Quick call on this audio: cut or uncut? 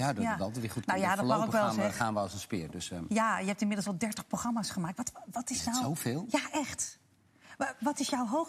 uncut